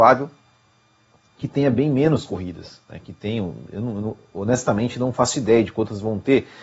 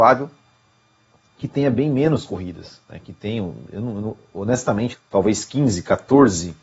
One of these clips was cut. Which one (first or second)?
second